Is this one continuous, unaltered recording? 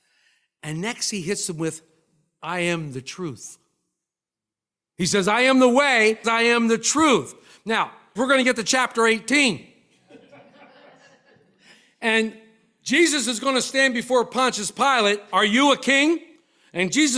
no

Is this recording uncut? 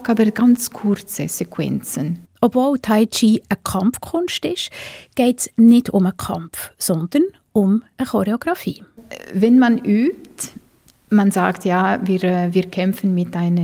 yes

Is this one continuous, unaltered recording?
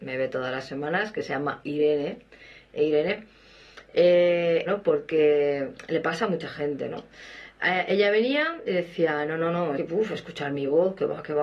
no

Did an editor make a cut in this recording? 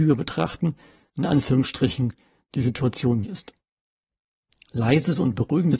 yes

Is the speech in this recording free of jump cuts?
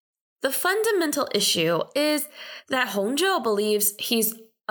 yes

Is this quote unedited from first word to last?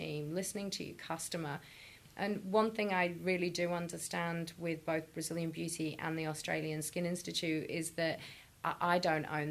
yes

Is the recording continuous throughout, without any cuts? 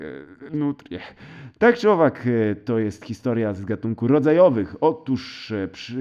yes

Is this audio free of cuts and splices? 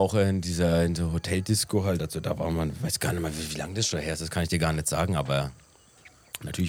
yes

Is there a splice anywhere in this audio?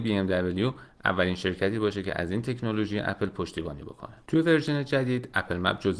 yes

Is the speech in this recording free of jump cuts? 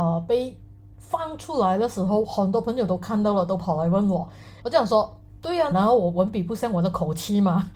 no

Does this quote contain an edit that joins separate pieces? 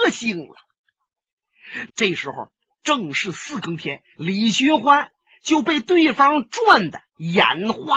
yes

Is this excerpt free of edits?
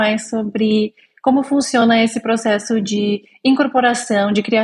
yes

